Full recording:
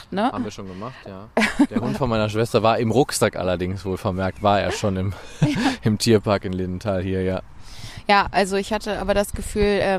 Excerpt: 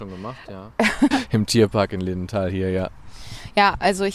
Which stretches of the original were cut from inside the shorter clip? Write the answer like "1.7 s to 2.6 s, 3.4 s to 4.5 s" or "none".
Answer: 1.7 s to 5.6 s